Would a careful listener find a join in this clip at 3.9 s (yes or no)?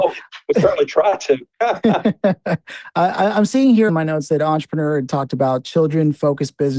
yes